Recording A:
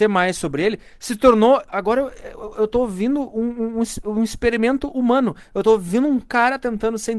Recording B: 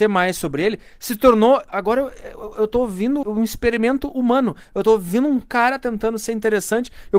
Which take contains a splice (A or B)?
B